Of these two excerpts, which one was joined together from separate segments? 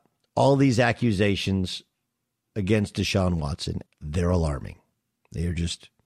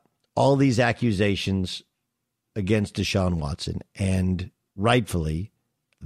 first; 1 cut; at 3.9 s

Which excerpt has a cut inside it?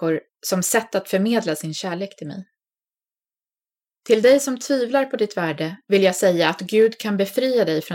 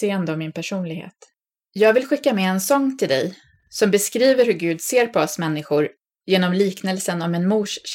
second; 1 cut; at 1.7 s

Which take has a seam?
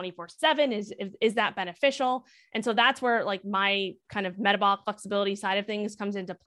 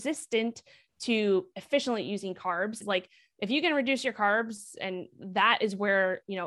second; 1 cut; at 2.8 s

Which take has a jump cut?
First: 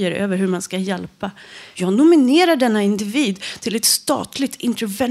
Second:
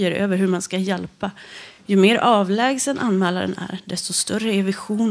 first; 1 cut; at 1.7 s

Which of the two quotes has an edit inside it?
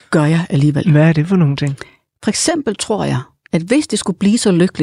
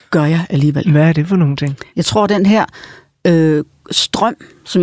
second; 1 cut; at 1.9 s

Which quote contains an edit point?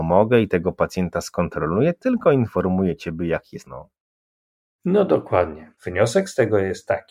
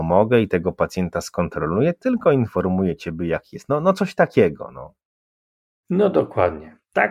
first; 2 cuts; at 3.7 s, 5.8 s

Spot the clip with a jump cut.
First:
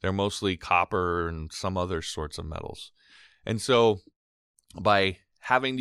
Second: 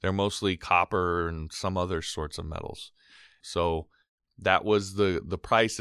second; 1 cut; at 3.4 s

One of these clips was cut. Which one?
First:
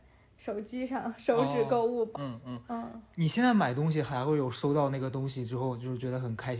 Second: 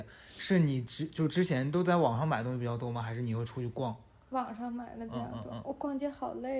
first; 1 cut; at 2.1 s

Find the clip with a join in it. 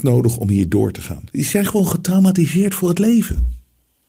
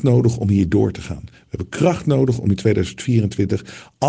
first; 1 cut; at 1.3 s

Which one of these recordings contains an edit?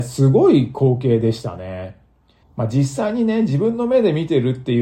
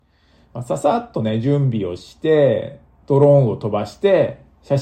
first; 1 cut; at 2.4 s

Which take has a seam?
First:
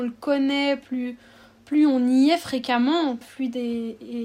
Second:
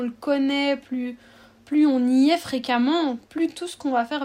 first; 1 cut; at 3.2 s

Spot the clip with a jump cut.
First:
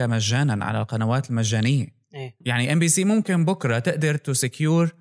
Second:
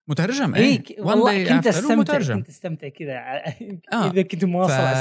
first; 1 cut; at 2.4 s

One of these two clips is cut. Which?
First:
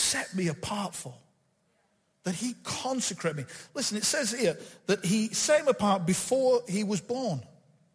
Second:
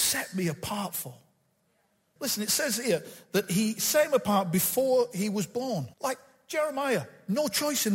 second; 2 cuts; at 2.2 s, 5.9 s

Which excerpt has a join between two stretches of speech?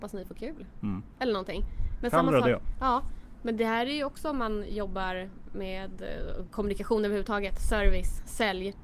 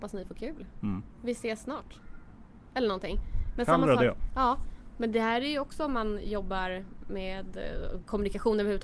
first; 1 cut; at 1.1 s

